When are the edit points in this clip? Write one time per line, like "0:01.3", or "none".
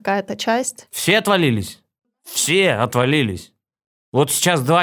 none